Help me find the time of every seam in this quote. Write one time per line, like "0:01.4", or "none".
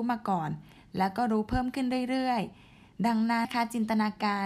0:03.4